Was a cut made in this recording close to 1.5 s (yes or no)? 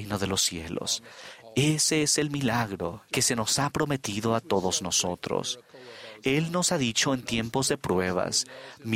no